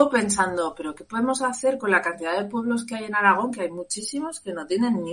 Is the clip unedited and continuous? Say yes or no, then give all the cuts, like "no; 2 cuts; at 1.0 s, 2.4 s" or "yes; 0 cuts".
yes; 0 cuts